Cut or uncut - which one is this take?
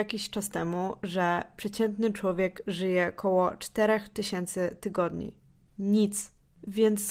cut